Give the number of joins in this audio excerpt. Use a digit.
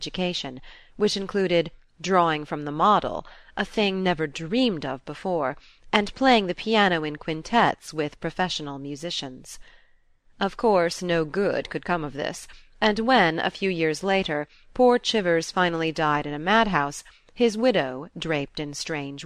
0